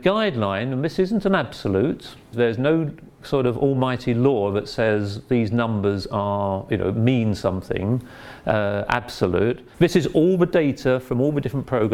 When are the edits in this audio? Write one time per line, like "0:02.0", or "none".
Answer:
0:02.3
0:09.7